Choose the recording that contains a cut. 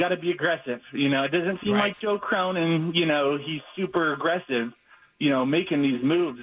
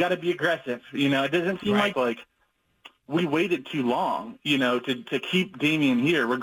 second; 2 cuts; at 1.9 s, 5.0 s

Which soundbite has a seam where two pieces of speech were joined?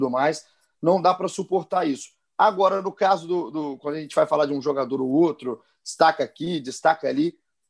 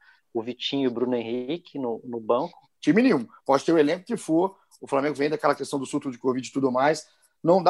second; 1 cut; at 2.8 s

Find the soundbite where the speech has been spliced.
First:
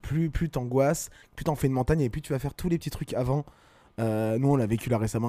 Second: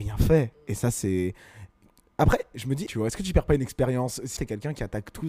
second; 2 cuts; at 2.9 s, 4.4 s

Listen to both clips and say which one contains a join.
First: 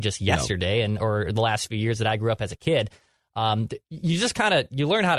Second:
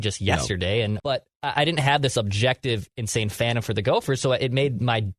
second; 1 cut; at 1.0 s

